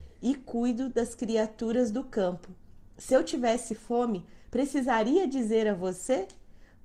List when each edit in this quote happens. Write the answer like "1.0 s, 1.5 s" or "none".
none